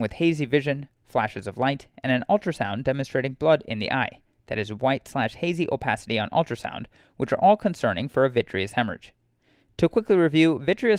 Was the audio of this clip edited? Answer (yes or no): no